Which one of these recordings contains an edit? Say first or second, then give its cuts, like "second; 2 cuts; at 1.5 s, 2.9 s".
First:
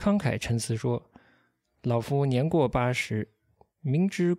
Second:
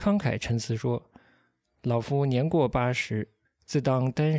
second; 1 cut; at 3.4 s